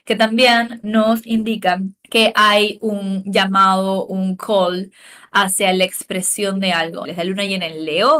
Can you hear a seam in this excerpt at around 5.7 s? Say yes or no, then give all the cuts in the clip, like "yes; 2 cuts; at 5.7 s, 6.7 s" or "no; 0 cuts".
no; 2 cuts; at 2.0 s, 7.0 s